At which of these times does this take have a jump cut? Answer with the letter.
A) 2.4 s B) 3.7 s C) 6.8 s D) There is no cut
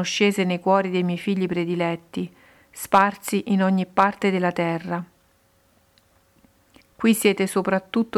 C